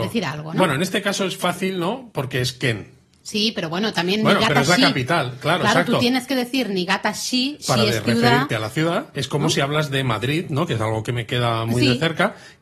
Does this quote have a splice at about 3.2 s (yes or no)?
yes